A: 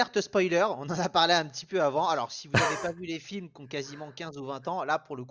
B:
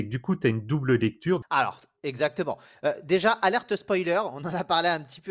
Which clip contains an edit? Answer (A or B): B